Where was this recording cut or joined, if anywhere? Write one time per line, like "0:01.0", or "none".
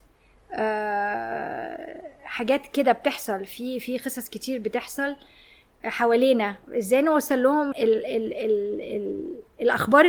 0:07.7